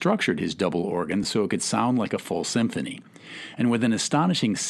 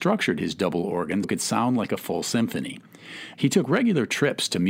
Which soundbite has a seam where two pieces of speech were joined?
second; 2 cuts; at 1.2 s, 3.3 s

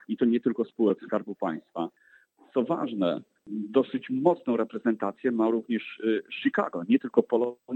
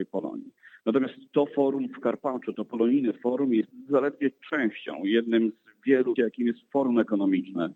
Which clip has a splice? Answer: second; 1 cut; at 6.2 s

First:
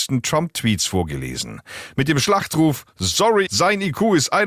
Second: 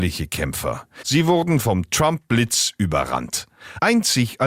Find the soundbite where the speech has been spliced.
first; 1 cut; at 3.5 s

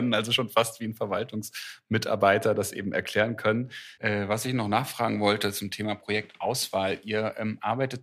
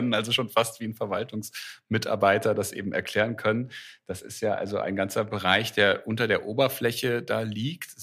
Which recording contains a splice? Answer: first; 1 cut; at 4.0 s

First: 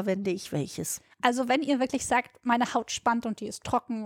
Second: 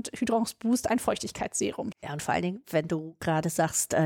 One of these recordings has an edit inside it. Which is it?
second; 1 cut; at 1.9 s

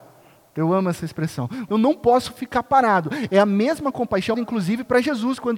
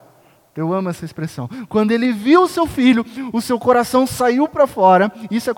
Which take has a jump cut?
first; 2 cuts; at 1.7 s, 4.3 s

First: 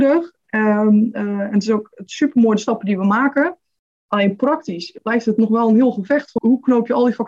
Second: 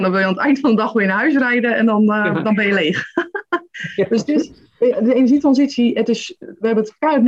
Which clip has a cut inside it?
first; 1 cut; at 6.4 s

